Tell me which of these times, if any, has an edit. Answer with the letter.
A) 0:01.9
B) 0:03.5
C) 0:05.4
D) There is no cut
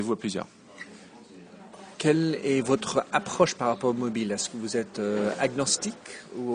A